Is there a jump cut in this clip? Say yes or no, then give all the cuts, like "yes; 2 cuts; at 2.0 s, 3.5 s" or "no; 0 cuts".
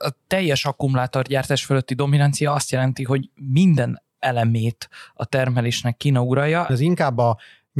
yes; 1 cut; at 6.7 s